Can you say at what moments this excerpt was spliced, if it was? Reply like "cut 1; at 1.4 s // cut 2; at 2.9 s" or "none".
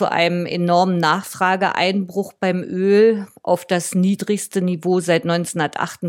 none